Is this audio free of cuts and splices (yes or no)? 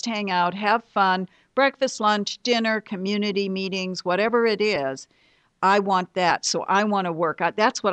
yes